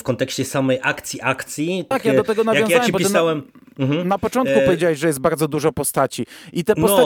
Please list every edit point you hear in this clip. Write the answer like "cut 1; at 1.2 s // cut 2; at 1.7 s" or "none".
cut 1; at 1.9 s

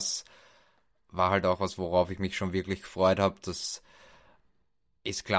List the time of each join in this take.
none

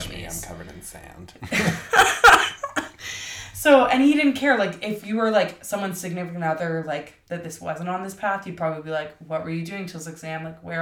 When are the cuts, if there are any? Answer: none

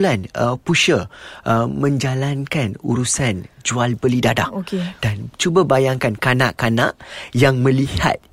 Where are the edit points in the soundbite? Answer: none

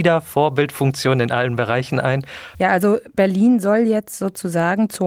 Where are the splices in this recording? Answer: cut 1; at 2.5 s

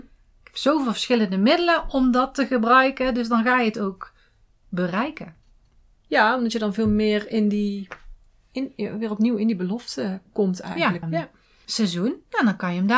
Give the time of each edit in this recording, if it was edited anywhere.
cut 1; at 11.0 s

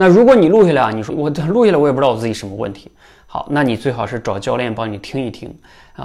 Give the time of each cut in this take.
cut 1; at 1.1 s

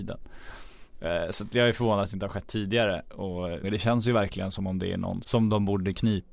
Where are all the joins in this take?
cut 1; at 3.6 s // cut 2; at 5.2 s

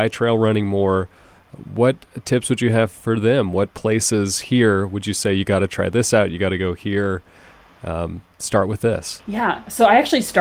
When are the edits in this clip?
none

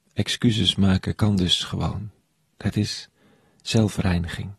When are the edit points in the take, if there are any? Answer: none

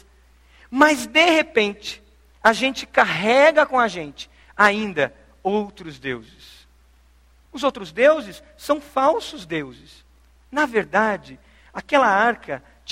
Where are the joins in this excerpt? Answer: cut 1; at 7.5 s

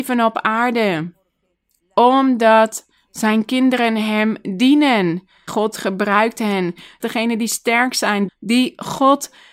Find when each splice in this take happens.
cut 1; at 5.5 s // cut 2; at 7.0 s // cut 3; at 8.3 s

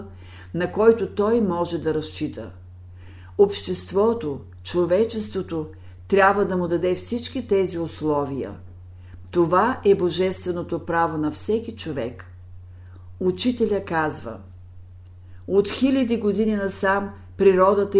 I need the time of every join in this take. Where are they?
none

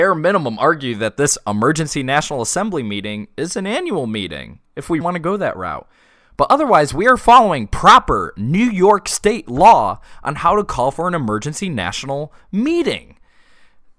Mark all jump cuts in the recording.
cut 1; at 5.0 s

